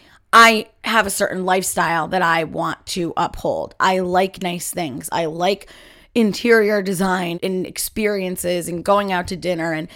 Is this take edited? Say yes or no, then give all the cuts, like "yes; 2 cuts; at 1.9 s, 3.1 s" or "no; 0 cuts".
yes; 2 cuts; at 5.1 s, 7.3 s